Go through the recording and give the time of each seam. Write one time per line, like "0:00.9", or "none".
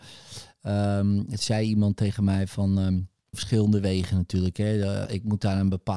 0:03.3
0:05.1